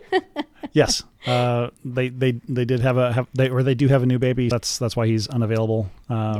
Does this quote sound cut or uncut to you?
cut